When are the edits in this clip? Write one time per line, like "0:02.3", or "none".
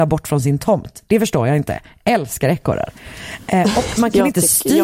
none